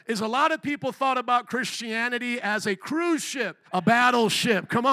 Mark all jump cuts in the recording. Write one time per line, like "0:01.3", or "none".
0:03.7

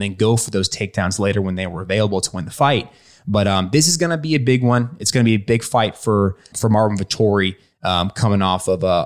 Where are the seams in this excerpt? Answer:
0:06.5

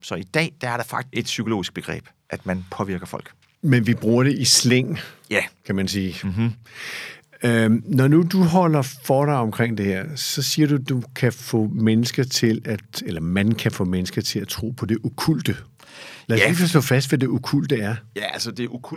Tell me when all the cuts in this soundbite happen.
0:01.1

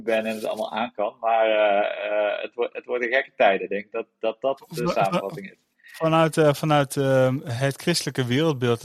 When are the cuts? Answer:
none

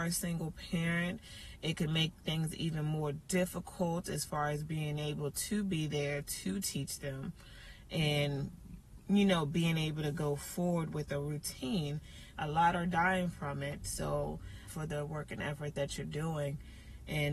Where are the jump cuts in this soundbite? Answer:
0:12.3
0:14.7

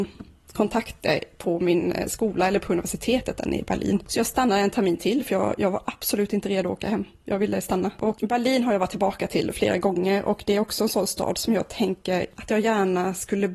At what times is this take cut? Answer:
none

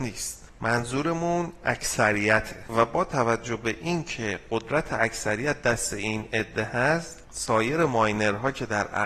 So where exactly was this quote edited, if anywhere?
0:02.7

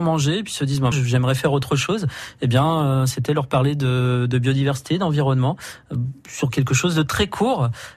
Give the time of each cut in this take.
0:00.9

